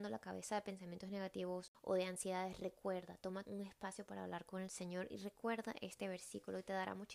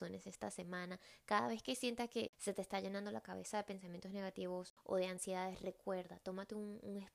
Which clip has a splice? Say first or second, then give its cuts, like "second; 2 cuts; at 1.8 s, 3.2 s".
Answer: first; 1 cut; at 3.4 s